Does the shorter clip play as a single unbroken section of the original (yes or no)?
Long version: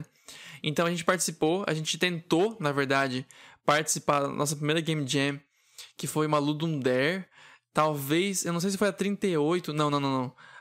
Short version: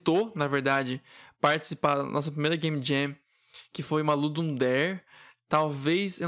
yes